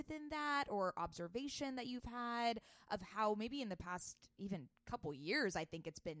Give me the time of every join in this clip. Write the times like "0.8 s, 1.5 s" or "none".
none